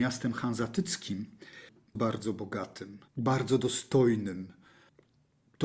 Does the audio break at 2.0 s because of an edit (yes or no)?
yes